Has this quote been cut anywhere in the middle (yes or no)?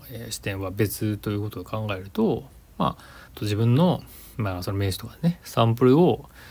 yes